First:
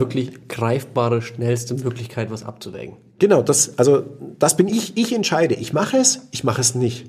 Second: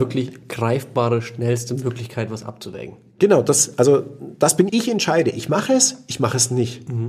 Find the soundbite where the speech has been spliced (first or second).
second